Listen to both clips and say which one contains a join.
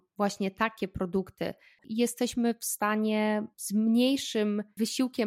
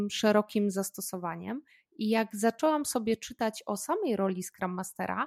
first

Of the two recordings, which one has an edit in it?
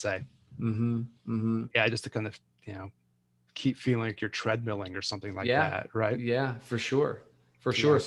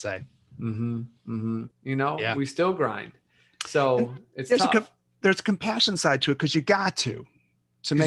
second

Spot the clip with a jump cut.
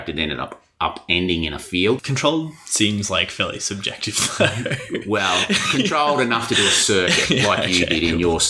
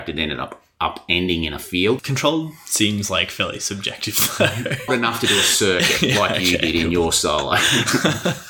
second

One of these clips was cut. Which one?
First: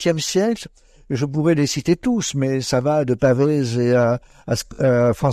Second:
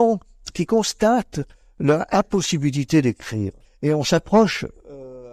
second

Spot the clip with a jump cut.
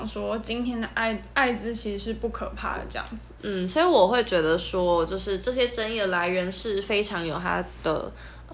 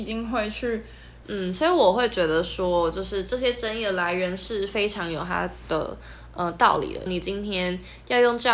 second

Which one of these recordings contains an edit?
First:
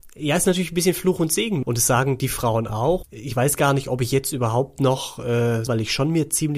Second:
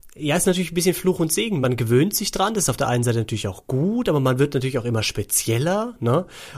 first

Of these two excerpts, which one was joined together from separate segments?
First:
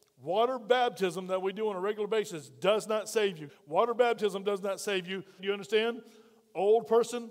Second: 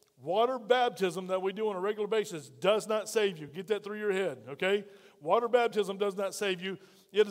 first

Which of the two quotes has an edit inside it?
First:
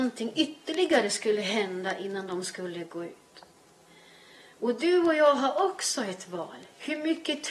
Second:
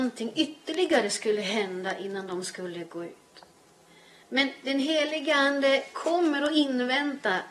second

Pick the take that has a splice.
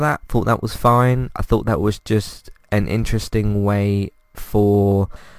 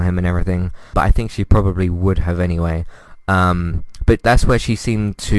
second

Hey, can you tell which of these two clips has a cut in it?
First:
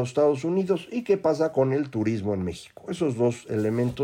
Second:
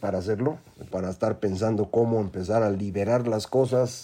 second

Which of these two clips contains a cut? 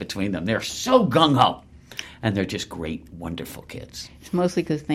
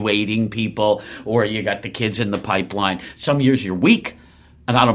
first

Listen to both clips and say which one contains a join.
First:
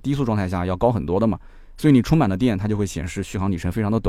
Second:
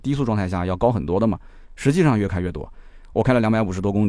second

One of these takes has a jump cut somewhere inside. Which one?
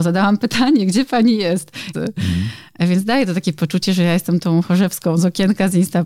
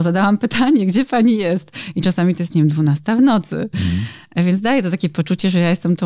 first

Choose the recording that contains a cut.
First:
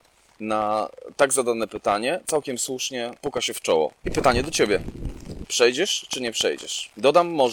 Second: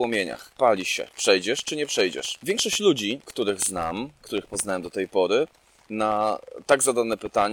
first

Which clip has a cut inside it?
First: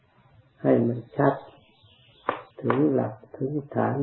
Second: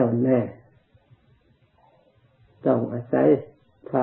first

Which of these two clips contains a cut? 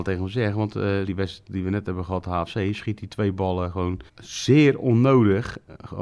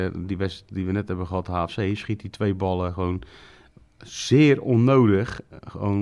first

